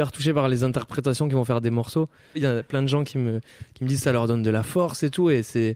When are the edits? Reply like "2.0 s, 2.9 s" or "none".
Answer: 2.3 s